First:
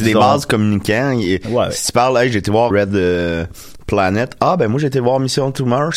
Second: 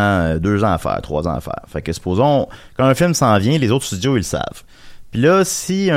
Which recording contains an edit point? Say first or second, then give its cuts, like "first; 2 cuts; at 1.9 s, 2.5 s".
first; 1 cut; at 2.7 s